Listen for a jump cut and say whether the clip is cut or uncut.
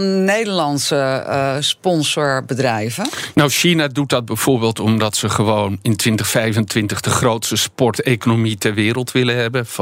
cut